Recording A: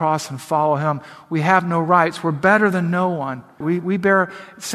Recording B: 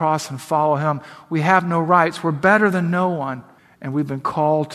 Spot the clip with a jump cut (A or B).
A